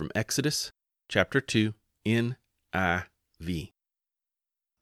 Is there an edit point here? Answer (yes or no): yes